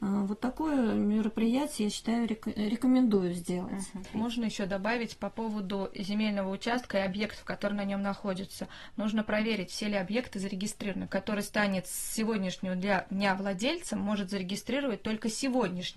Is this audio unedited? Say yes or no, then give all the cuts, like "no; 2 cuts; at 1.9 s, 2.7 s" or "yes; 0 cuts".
no; 2 cuts; at 4.1 s, 11.1 s